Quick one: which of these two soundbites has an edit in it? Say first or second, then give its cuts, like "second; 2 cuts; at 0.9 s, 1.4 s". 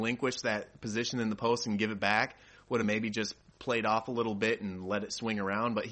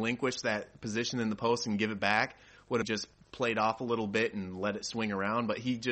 second; 1 cut; at 2.8 s